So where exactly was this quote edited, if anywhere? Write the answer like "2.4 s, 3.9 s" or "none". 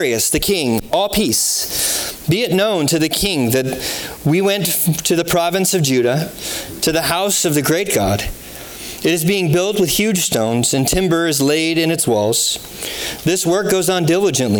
none